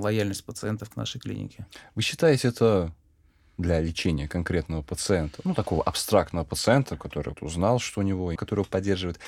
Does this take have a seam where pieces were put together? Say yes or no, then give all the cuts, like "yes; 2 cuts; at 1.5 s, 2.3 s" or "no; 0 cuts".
yes; 2 cuts; at 7.3 s, 8.4 s